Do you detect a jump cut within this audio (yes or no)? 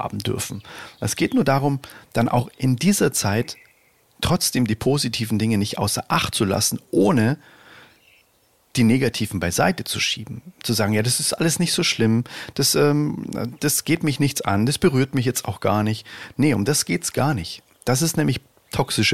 no